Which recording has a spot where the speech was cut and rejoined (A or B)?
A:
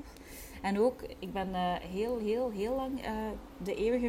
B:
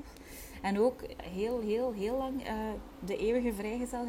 B